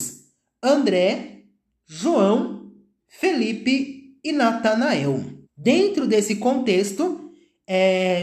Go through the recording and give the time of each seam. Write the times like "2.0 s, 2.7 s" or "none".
3.0 s, 5.4 s